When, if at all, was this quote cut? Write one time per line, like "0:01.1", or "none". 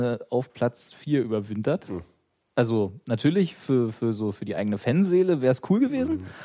none